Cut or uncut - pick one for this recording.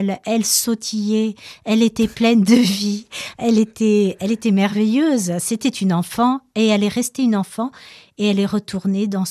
uncut